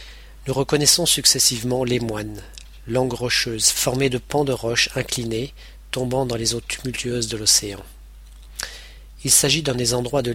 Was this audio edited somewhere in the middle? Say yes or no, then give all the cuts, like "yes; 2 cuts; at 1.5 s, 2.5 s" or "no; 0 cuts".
no; 0 cuts